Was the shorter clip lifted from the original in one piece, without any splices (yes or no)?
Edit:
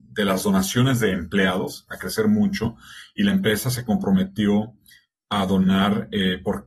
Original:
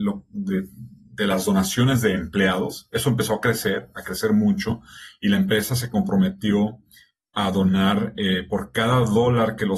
no